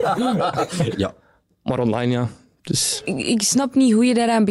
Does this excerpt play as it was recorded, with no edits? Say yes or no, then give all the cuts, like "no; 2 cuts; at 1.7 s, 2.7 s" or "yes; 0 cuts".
no; 1 cut; at 0.9 s